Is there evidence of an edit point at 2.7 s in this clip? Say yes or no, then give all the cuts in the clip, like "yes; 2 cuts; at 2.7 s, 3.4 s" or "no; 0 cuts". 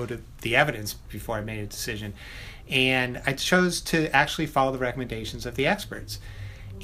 no; 0 cuts